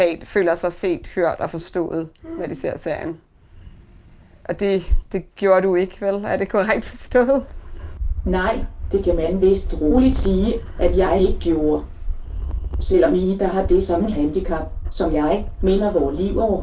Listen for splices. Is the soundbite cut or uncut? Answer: uncut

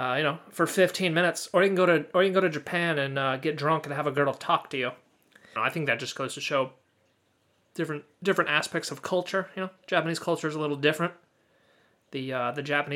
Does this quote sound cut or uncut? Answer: cut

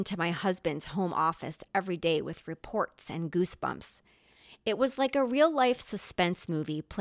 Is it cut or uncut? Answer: uncut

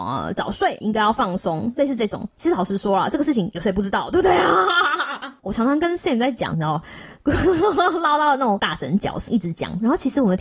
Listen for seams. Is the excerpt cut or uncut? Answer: cut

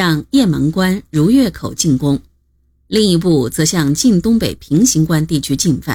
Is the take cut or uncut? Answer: uncut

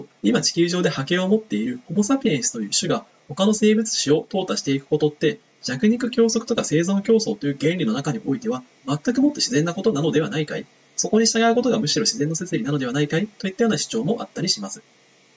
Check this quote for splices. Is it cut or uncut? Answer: uncut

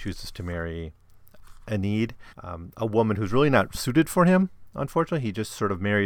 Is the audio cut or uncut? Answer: cut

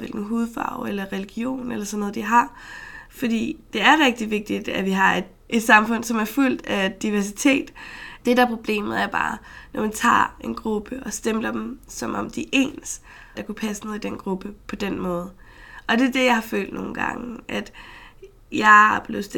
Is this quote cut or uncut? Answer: cut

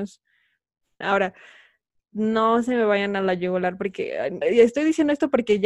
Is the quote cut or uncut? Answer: cut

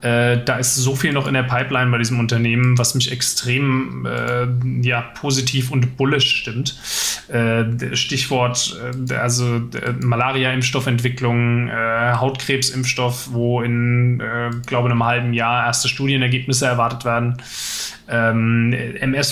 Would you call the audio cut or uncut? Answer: uncut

